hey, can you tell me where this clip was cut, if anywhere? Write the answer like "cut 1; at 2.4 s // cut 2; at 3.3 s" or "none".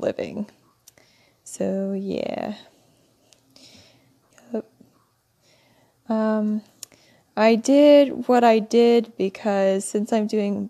cut 1; at 4.3 s